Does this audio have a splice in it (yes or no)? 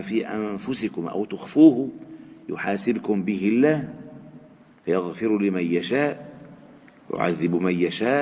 no